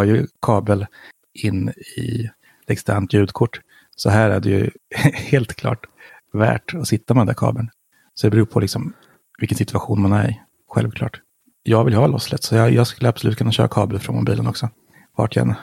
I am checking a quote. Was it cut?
no; 0 cuts

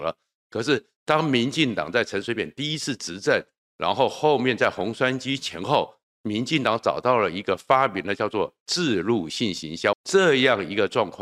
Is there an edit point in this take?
yes; 1 cut; at 9.9 s

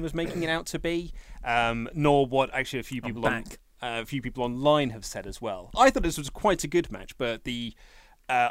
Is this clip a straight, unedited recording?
yes; 0 cuts

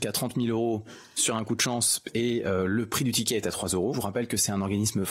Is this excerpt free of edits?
no; 1 cut; at 3.9 s

